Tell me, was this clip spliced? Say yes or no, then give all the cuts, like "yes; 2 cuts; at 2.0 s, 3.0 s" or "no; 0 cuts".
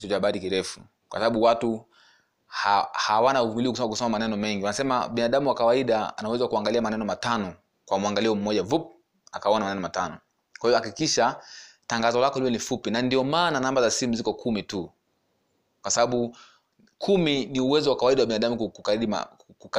no; 0 cuts